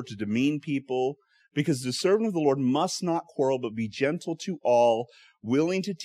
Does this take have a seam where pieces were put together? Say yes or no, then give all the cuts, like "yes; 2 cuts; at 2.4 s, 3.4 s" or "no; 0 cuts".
no; 0 cuts